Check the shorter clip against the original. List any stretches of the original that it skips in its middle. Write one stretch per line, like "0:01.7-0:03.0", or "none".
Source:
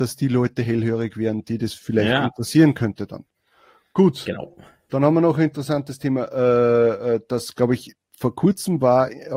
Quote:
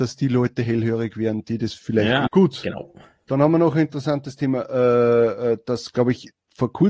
0:02.3-0:03.9